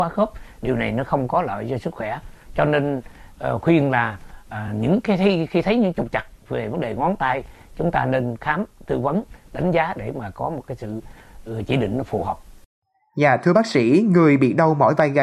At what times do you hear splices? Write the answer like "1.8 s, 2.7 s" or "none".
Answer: none